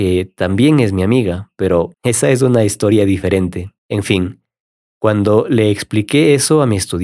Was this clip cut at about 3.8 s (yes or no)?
yes